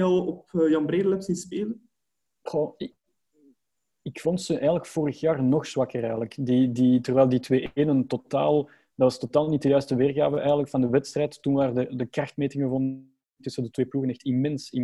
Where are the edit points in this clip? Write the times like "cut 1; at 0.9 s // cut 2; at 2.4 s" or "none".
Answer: none